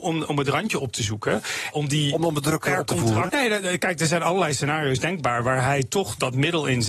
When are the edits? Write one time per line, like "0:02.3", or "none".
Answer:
0:01.7
0:03.3